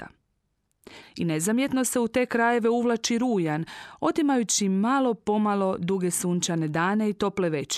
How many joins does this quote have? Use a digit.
1